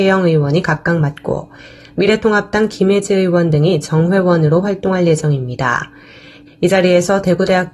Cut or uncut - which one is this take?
cut